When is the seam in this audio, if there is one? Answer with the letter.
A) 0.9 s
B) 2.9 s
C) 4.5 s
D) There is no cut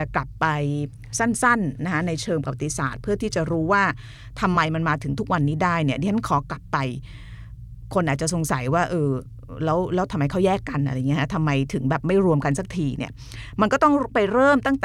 D